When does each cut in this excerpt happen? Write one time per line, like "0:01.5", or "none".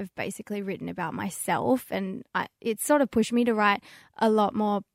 none